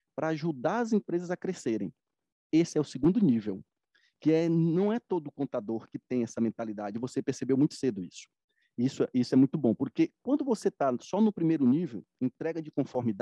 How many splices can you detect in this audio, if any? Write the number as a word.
zero